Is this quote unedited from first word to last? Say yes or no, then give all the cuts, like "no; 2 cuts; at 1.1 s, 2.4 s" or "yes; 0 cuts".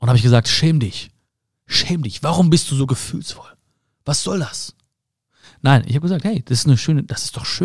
yes; 0 cuts